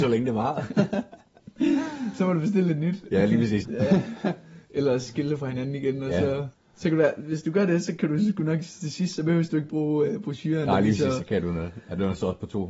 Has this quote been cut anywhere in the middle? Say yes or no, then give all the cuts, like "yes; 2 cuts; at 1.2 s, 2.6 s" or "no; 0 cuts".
yes; 2 cuts; at 3.6 s, 6.5 s